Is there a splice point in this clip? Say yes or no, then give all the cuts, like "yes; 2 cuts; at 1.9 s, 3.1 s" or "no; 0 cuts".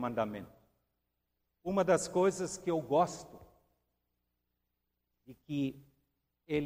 no; 0 cuts